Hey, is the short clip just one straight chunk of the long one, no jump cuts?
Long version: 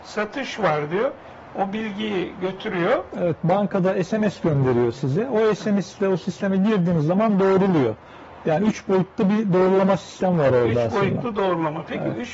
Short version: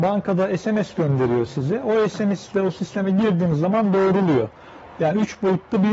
yes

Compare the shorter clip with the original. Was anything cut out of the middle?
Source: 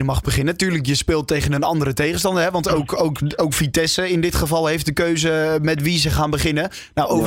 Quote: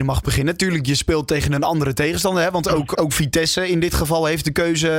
yes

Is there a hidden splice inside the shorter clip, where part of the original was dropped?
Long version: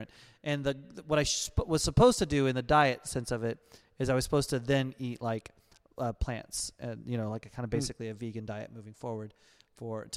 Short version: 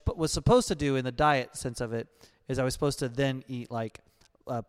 no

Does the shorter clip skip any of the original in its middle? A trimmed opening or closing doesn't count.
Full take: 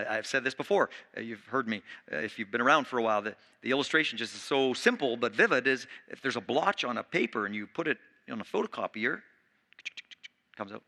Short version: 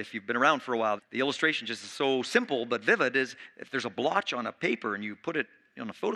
yes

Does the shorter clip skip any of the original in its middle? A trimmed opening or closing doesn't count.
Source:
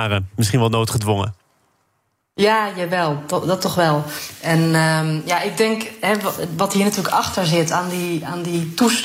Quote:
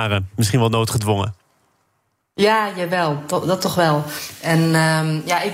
no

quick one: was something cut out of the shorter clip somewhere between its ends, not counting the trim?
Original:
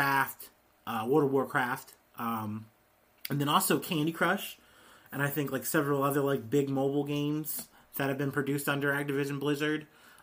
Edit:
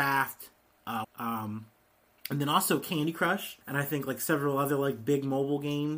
yes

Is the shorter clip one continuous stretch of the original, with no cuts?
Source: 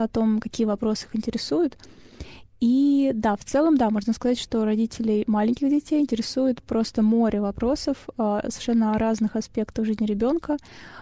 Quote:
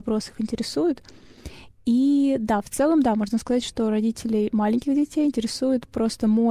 yes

